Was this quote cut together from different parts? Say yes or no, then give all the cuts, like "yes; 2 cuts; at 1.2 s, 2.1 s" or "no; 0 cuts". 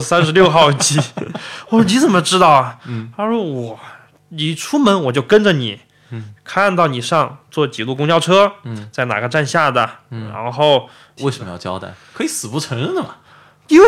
yes; 2 cuts; at 6.4 s, 11.2 s